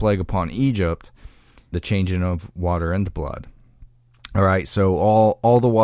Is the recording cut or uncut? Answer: cut